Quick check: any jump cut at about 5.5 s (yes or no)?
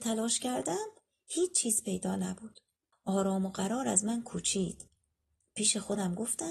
no